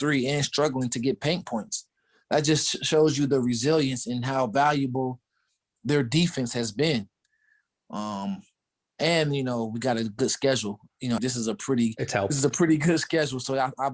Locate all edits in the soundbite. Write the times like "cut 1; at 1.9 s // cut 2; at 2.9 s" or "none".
cut 1; at 11.2 s